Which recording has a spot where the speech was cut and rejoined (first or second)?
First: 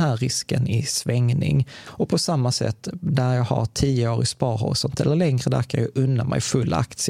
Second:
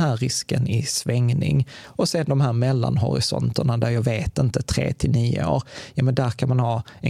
second